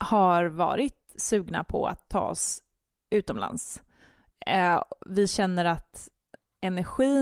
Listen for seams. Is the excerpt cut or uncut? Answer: uncut